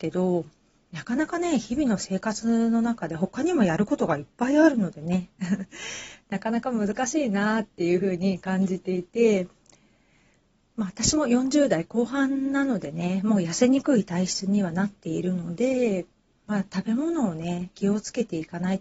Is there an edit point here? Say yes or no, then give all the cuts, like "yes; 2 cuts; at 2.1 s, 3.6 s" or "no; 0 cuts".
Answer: no; 0 cuts